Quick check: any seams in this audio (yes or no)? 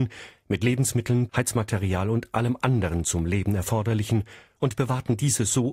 yes